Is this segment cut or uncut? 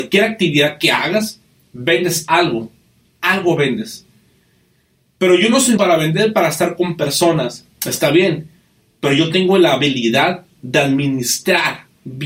cut